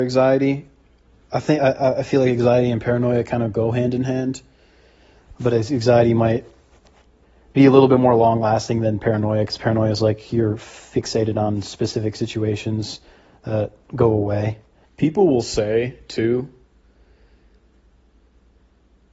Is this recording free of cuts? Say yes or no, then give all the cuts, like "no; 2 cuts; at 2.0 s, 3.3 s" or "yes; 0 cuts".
no; 1 cut; at 14.9 s